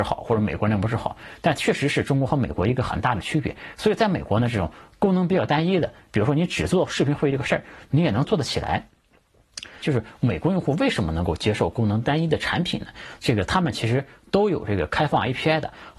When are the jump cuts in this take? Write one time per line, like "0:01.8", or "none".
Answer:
0:09.8
0:13.2